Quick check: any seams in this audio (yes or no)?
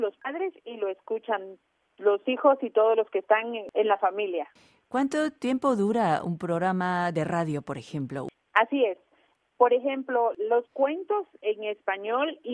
yes